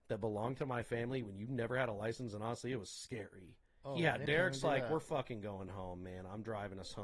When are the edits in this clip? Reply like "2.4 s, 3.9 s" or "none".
4.3 s